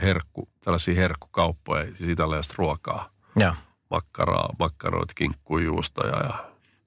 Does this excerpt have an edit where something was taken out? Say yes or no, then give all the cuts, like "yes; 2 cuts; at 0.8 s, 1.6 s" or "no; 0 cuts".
no; 0 cuts